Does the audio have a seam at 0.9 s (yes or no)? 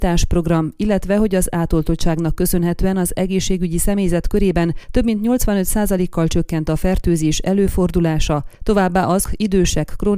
no